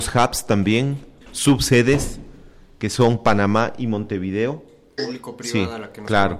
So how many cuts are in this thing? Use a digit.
2